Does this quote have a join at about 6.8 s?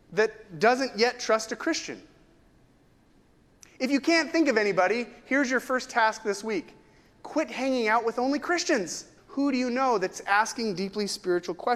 no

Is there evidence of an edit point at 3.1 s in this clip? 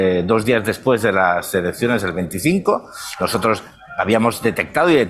no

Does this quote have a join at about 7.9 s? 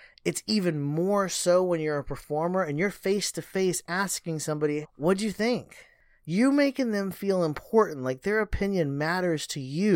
no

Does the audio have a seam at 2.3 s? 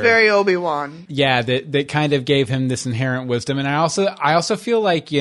no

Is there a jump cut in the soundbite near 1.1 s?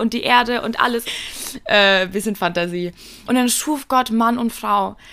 yes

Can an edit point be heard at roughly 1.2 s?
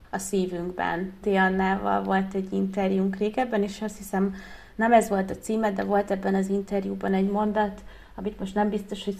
yes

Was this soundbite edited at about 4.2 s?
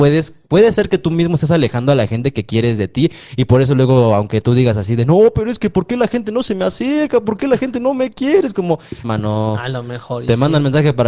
no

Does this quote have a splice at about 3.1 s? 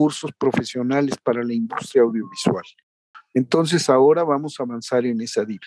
yes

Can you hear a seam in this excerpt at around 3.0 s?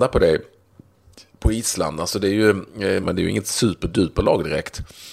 yes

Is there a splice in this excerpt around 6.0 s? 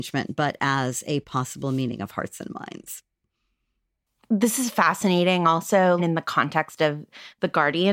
yes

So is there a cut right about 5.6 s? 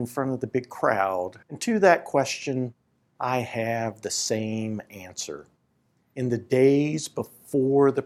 no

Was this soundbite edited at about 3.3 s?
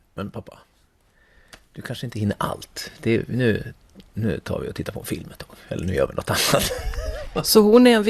no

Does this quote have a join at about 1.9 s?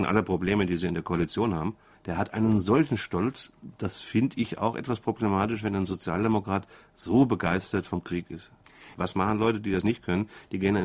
yes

